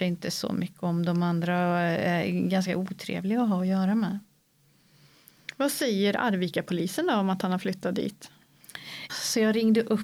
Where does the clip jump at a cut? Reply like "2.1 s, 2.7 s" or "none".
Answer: 9.1 s